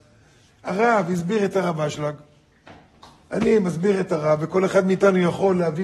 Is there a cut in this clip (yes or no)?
no